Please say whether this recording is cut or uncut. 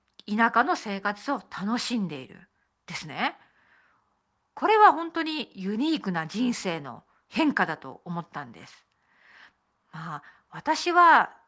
uncut